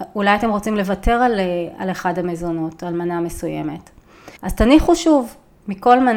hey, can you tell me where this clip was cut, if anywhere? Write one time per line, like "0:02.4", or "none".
0:04.4